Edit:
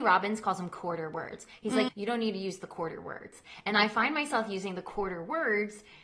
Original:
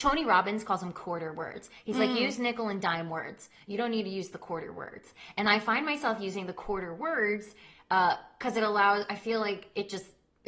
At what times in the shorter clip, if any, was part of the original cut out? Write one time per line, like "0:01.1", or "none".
0:01.9